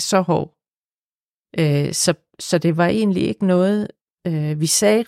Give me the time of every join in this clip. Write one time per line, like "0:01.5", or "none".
none